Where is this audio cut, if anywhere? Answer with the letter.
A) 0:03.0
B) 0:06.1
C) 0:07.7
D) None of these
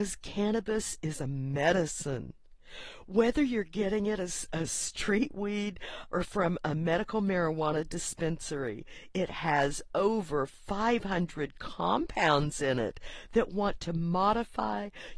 B